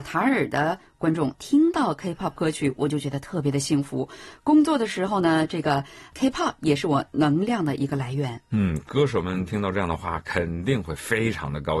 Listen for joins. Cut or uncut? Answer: cut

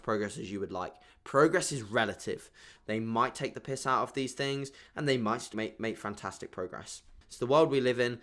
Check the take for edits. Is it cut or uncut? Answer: cut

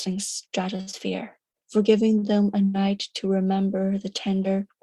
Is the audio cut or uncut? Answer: uncut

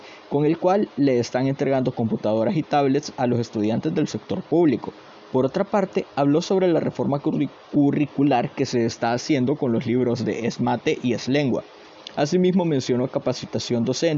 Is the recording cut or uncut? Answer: uncut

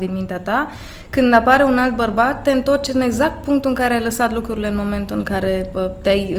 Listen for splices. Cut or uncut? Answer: uncut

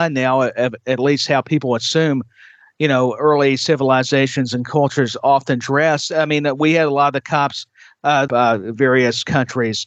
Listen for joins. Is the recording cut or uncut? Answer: cut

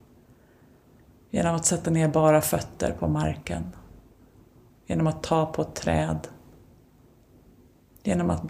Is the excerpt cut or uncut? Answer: uncut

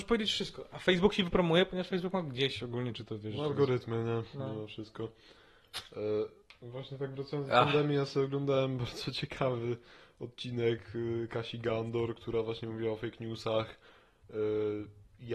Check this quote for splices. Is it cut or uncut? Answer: uncut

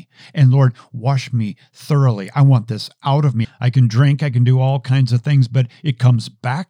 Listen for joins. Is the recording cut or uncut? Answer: cut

